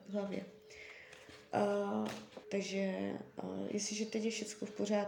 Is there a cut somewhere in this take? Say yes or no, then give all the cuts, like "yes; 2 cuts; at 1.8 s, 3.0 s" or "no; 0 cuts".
yes; 1 cut; at 2.4 s